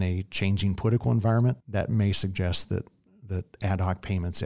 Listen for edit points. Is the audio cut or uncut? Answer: cut